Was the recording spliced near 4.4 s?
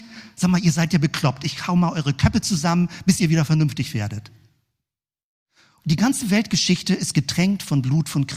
no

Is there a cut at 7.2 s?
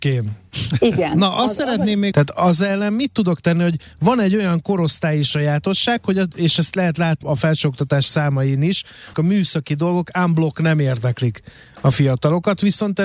yes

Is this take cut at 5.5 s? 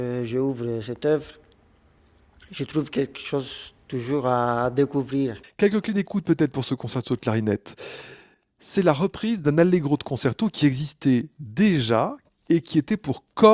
no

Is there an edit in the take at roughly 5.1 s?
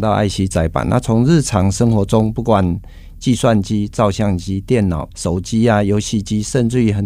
yes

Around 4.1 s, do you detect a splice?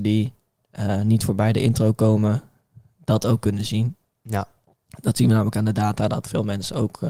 no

